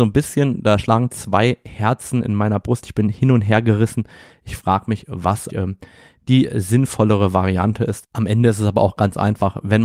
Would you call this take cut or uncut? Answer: cut